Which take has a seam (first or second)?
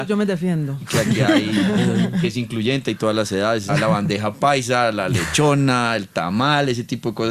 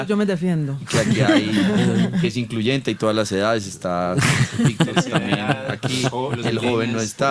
first